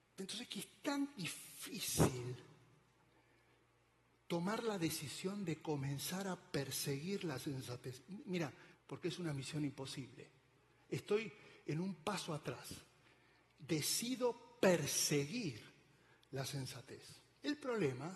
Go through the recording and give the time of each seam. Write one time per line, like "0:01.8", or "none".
0:08.7